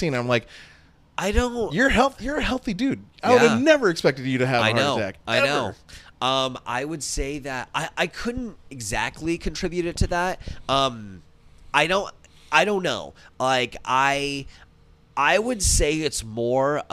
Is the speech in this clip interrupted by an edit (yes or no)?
no